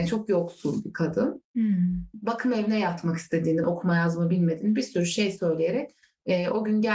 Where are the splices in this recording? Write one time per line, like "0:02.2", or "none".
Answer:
0:03.6